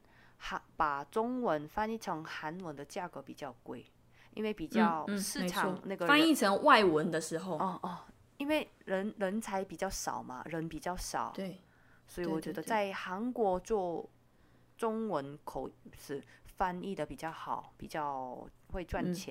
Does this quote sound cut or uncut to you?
uncut